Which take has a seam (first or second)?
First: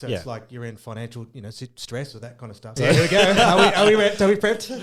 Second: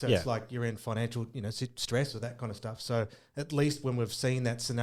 first